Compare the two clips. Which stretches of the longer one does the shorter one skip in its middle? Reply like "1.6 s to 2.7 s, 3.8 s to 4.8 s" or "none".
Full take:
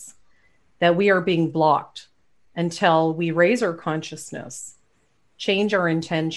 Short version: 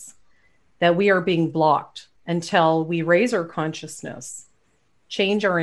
2.2 s to 2.4 s